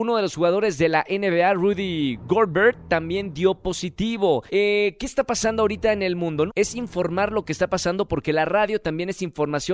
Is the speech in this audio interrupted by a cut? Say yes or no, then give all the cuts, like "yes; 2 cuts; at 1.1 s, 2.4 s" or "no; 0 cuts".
yes; 2 cuts; at 4.5 s, 6.5 s